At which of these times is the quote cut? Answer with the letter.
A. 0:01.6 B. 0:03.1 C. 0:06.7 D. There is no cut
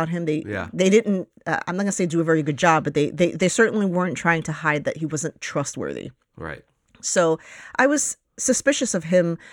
D